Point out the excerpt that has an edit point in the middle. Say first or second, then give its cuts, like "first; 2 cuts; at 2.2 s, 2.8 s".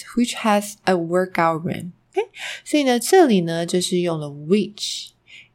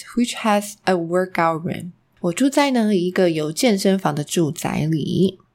first; 1 cut; at 2.0 s